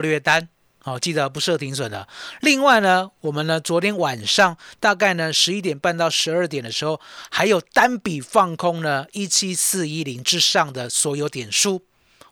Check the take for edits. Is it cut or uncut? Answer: uncut